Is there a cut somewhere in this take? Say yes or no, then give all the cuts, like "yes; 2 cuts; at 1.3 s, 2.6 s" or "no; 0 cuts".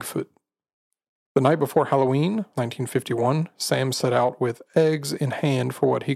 yes; 2 cuts; at 1.1 s, 2.5 s